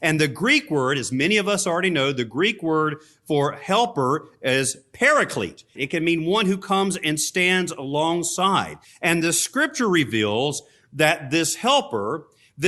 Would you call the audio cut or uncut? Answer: cut